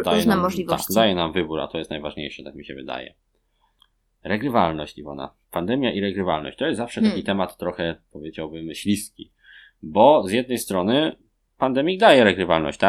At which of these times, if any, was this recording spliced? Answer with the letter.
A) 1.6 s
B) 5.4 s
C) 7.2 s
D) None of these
B